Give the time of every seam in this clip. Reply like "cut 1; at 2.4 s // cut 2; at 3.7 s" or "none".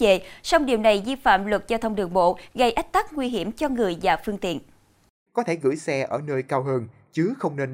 cut 1; at 5.3 s